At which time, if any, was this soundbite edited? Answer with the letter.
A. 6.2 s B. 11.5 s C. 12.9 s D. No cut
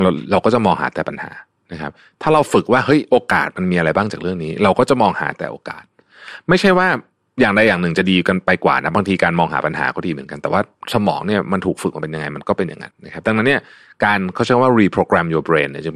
C